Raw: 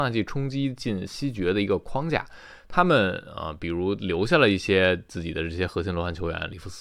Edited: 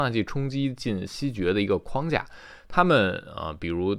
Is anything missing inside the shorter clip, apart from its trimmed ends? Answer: no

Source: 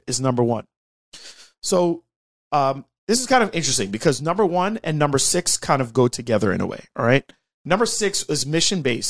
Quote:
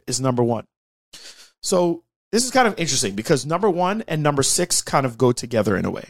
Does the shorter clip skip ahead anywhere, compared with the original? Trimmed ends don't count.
yes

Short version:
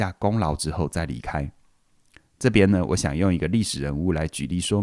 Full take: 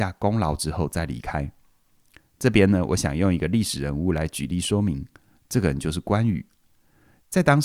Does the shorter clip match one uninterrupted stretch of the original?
yes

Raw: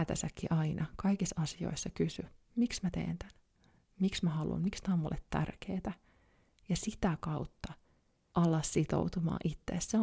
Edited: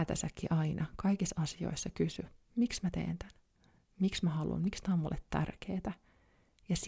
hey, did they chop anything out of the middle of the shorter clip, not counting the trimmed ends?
no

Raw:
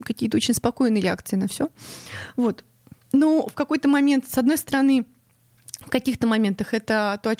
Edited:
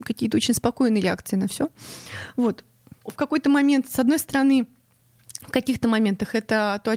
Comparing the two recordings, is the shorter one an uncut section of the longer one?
no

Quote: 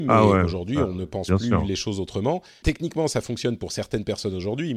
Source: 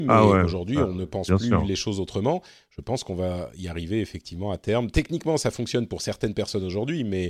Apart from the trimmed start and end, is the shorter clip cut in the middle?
yes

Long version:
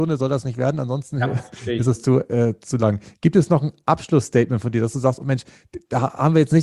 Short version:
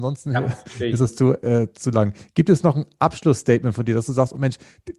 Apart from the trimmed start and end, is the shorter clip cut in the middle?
no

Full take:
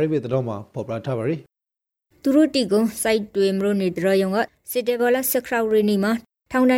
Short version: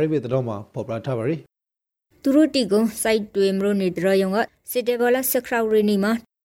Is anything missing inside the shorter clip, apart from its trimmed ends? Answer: no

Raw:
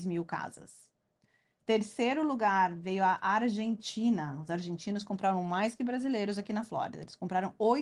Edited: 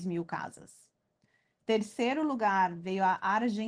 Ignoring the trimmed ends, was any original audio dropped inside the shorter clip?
no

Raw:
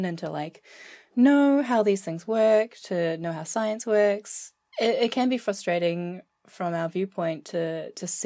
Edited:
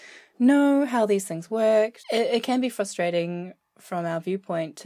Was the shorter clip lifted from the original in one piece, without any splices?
no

